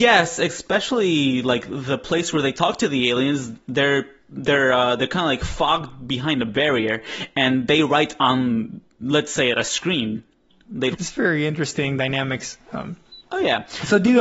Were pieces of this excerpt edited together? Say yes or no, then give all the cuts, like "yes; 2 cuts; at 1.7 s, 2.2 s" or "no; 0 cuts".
yes; 1 cut; at 10.9 s